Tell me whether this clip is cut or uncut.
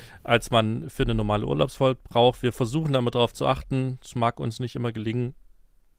uncut